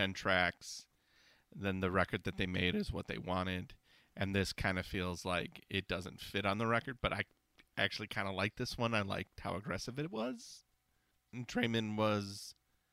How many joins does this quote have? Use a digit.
0